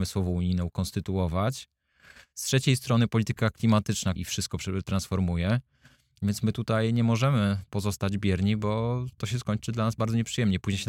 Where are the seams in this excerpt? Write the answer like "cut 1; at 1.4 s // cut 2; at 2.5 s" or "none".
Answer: cut 1; at 4.2 s